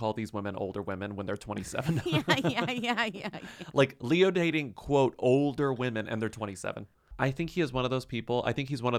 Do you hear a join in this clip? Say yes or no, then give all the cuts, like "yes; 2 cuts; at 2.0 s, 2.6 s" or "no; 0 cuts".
no; 0 cuts